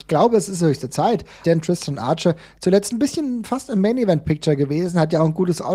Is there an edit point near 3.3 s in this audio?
no; 1 cut; at 1.4 s

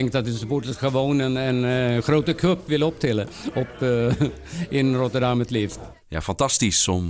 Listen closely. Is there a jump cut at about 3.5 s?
no; 0 cuts

